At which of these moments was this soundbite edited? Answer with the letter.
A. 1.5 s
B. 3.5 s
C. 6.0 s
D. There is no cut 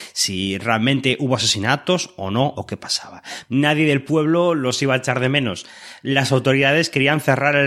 B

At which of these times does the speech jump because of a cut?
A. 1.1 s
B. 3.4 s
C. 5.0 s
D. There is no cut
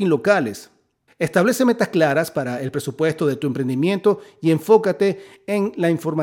A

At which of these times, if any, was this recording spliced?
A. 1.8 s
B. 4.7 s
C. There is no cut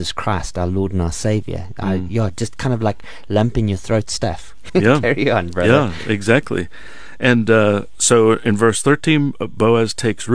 B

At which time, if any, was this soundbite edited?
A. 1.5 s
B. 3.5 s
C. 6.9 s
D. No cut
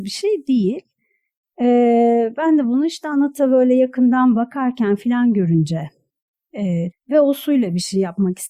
C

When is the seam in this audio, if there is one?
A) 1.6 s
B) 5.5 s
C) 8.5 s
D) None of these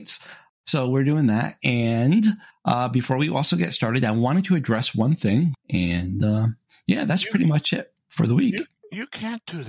B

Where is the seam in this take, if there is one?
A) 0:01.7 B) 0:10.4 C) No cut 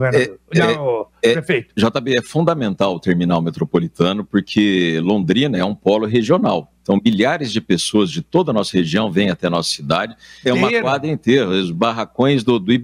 B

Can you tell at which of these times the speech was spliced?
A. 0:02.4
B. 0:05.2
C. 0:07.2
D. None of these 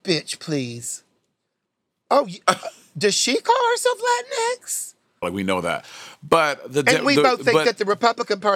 B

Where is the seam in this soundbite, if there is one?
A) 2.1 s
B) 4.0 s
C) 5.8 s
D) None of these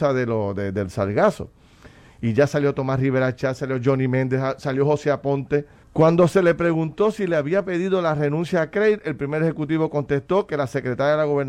C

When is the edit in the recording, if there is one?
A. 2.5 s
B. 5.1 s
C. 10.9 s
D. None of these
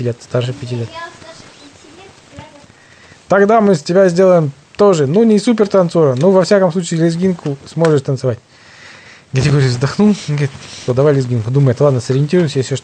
C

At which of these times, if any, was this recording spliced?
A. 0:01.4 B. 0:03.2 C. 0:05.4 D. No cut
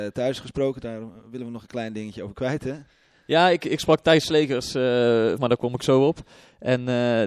C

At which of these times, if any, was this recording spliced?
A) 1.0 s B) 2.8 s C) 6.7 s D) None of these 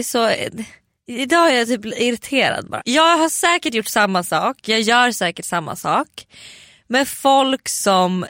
B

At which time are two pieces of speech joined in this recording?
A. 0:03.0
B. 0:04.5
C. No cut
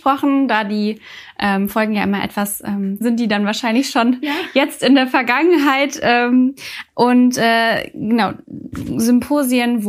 A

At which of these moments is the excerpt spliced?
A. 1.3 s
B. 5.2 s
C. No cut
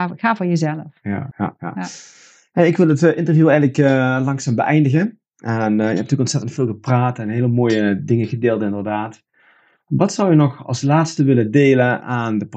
A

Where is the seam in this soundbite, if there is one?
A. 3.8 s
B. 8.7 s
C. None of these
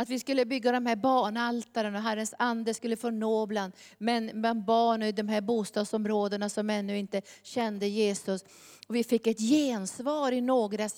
C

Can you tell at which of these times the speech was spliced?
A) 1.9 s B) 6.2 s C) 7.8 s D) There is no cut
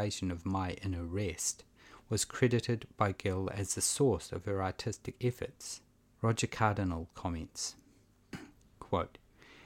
B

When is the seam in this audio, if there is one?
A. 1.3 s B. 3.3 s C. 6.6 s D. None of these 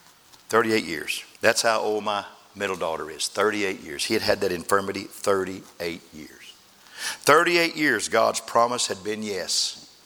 A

